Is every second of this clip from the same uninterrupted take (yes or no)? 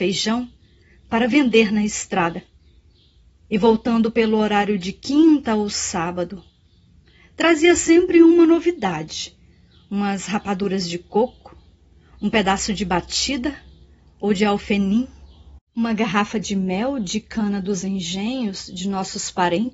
no